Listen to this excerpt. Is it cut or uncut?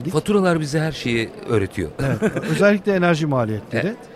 uncut